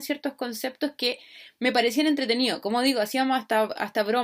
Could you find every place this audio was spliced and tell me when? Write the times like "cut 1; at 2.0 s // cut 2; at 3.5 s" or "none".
none